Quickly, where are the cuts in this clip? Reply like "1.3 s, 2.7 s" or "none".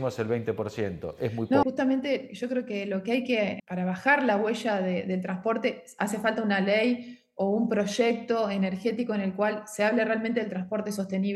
1.6 s, 3.6 s